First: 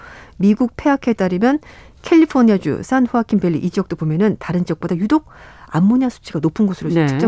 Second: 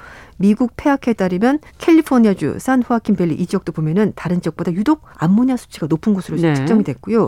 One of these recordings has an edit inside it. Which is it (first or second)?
second